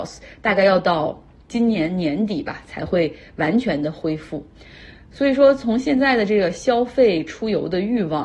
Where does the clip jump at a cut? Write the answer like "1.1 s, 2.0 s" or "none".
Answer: none